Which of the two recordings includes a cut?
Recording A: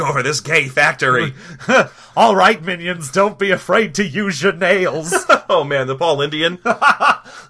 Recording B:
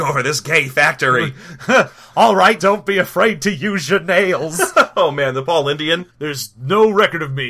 B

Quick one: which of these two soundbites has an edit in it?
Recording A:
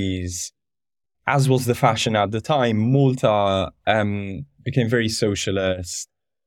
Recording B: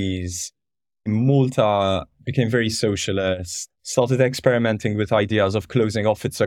B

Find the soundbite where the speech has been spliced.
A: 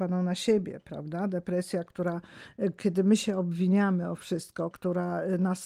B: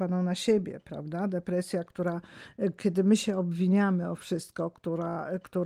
A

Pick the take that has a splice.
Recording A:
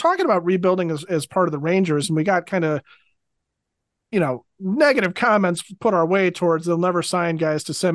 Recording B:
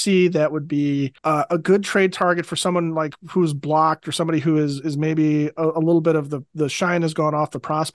B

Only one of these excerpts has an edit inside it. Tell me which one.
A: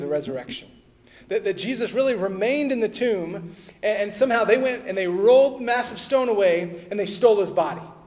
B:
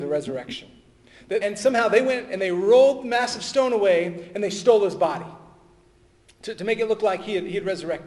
B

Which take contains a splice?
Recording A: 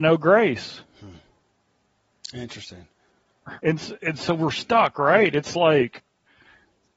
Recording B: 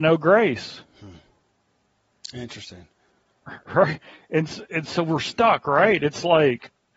A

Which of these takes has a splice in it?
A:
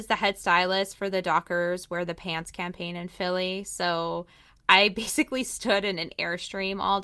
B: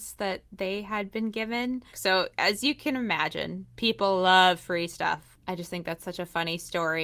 B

